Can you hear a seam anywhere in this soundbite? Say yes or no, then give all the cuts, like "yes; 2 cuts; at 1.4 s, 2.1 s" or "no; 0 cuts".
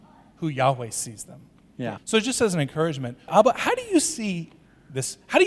yes; 2 cuts; at 2.0 s, 3.3 s